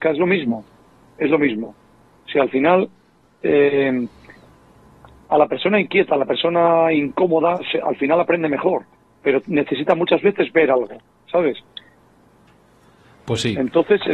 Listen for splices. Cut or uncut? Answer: uncut